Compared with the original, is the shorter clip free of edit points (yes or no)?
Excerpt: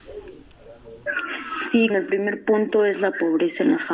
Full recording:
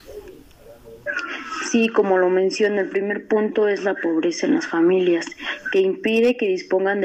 no